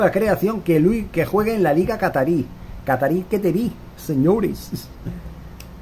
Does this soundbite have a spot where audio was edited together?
no; 0 cuts

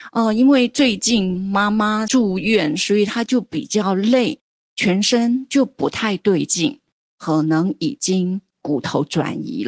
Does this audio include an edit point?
yes; 1 cut; at 7.0 s

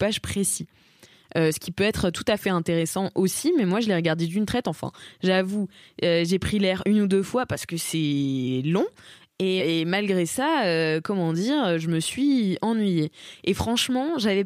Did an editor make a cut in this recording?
yes; 1 cut; at 9.6 s

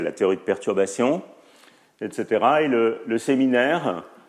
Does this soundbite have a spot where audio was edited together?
no; 0 cuts

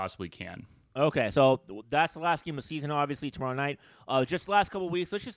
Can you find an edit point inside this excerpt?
no; 0 cuts

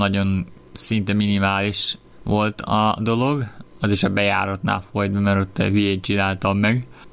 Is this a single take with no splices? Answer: yes; 0 cuts

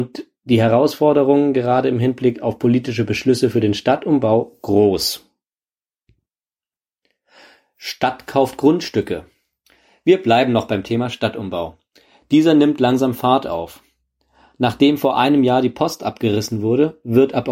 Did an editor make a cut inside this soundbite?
no; 0 cuts

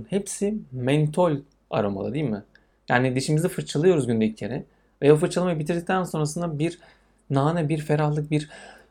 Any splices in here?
no; 0 cuts

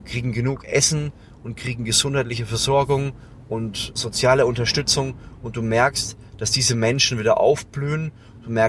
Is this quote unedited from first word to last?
no; 1 cut; at 3.9 s

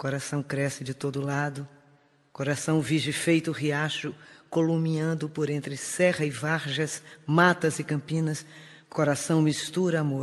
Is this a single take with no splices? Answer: yes; 0 cuts

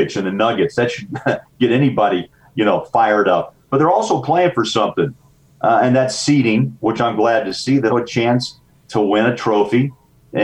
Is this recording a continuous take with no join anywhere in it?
no; 1 cut; at 7.9 s

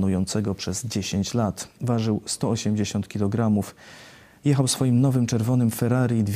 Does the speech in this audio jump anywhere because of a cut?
yes; 1 cut; at 1.8 s

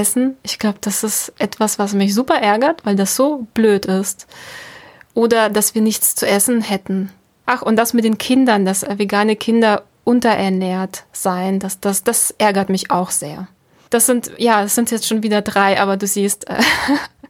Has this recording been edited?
yes; 1 cut; at 7.4 s

